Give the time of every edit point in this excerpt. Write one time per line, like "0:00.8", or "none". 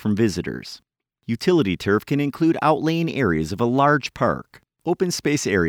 none